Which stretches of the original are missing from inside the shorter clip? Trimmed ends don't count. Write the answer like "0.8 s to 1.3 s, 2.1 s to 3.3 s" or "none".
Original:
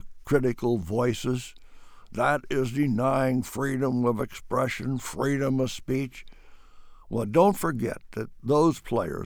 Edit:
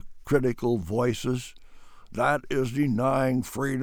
none